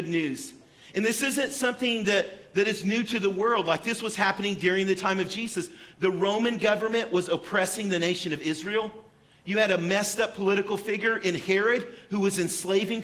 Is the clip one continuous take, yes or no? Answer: yes